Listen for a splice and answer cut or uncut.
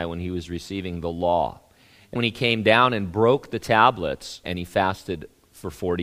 cut